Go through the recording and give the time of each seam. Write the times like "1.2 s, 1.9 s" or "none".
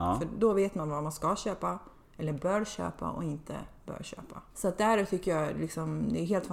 4.5 s